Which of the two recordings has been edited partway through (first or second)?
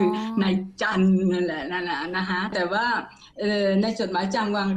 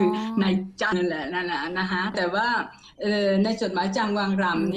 second